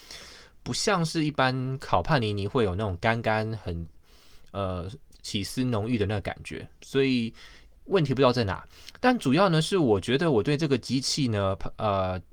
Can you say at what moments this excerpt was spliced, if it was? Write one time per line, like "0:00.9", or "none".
none